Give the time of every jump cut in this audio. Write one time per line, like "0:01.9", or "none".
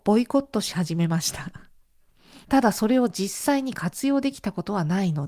0:02.4